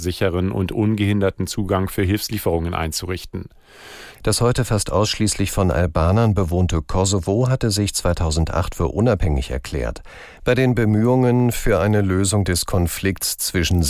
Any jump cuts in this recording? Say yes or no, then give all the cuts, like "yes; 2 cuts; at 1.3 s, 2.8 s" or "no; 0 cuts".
yes; 2 cuts; at 4.1 s, 10.4 s